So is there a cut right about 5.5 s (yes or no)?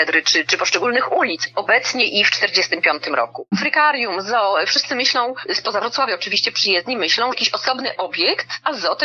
no